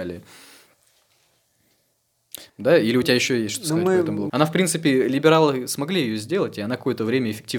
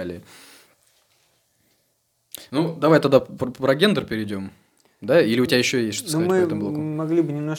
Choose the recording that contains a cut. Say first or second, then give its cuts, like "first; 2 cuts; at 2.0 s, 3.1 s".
first; 2 cuts; at 2.5 s, 4.3 s